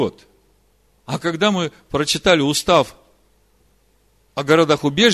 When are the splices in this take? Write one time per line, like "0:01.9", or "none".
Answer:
0:01.0